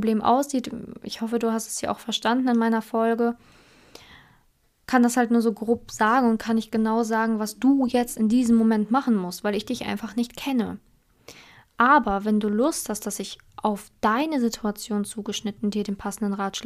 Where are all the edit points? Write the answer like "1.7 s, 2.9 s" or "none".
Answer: none

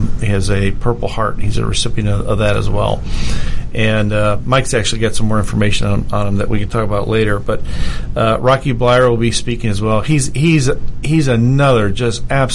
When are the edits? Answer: none

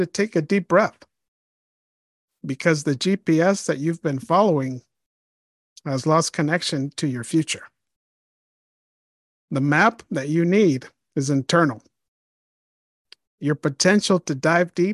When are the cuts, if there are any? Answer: none

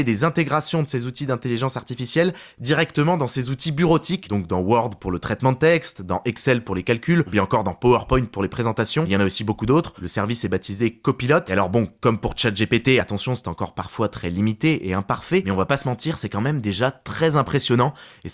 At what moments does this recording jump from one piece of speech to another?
none

